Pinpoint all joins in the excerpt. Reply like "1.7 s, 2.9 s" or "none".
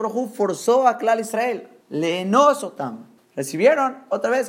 1.8 s, 3.2 s